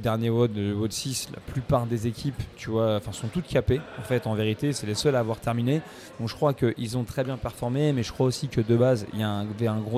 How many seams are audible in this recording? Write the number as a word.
zero